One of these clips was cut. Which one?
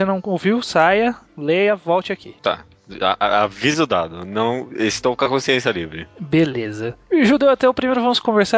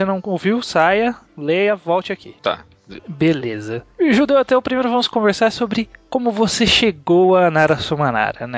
second; 1 cut; at 3.0 s

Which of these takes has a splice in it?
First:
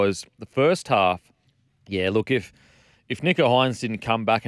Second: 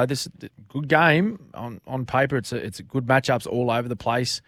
first; 1 cut; at 1.7 s

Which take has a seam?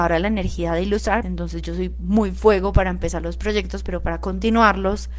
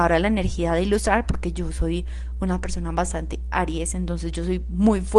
first; 1 cut; at 1.2 s

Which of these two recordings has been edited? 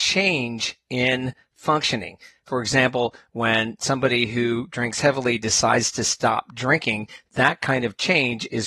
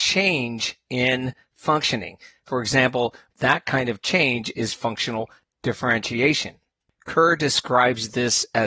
second; 1 cut; at 3.3 s

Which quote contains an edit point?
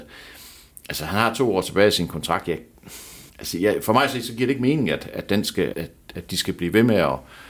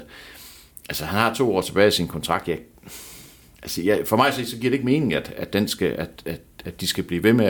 first; 2 cuts; at 3.3 s, 5.7 s

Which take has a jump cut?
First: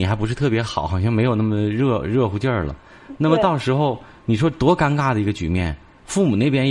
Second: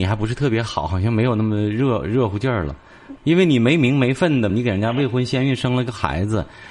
second; 2 cuts; at 3.2 s, 4.5 s

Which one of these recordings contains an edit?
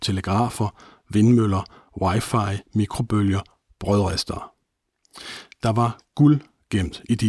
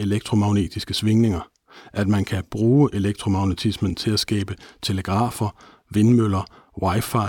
first; 1 cut; at 2.7 s

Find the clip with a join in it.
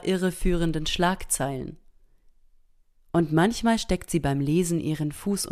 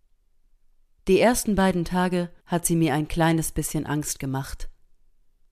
second; 1 cut; at 2.4 s

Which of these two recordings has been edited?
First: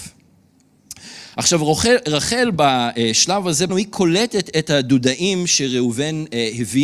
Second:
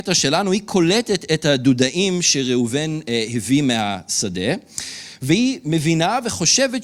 first; 1 cut; at 3.7 s

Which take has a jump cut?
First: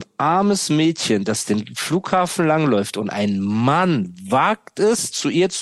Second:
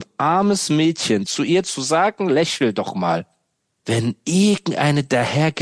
second; 2 cuts; at 1.2 s, 3.8 s

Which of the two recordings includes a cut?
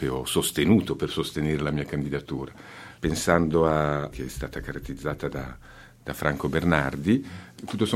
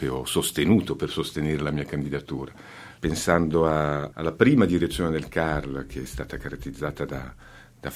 first; 1 cut; at 4.1 s

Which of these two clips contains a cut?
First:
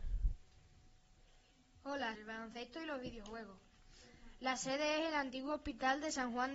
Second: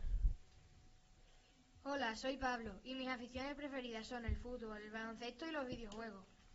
first; 1 cut; at 2.1 s

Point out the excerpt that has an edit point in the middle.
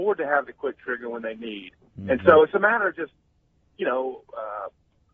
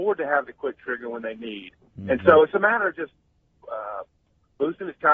second; 1 cut; at 3.6 s

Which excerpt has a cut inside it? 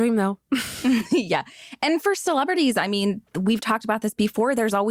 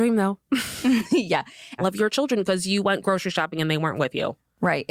second; 1 cut; at 1.8 s

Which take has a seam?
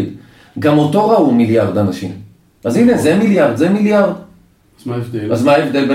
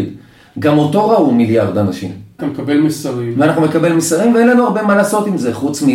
second; 1 cut; at 2.4 s

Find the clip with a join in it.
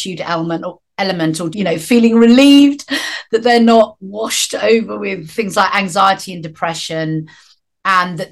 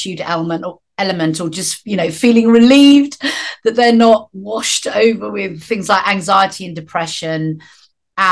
first; 1 cut; at 1.5 s

